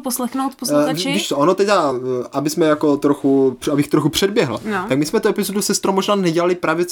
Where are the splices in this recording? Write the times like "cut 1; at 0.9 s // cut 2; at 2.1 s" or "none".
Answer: none